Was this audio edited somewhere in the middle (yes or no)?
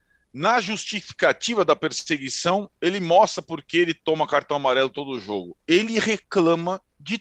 no